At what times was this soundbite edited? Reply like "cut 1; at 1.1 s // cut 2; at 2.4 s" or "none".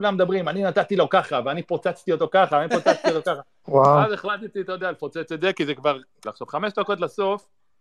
cut 1; at 3.6 s // cut 2; at 6.2 s